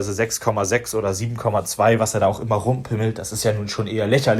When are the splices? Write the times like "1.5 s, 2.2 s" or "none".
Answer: none